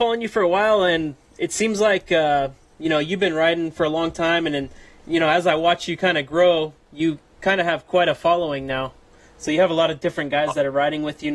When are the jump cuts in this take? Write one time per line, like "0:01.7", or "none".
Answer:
none